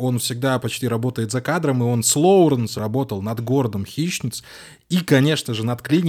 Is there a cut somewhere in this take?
yes; 1 cut; at 2.8 s

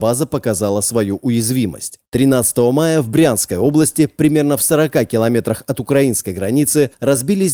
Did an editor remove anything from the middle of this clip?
yes; 1 cut; at 2.0 s

